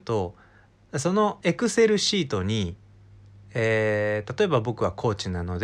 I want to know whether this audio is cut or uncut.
uncut